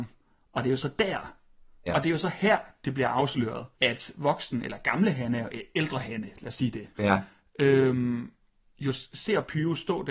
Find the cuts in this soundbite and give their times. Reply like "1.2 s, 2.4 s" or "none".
1.9 s, 3.7 s, 6.9 s